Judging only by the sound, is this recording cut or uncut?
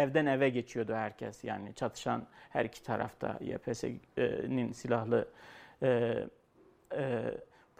cut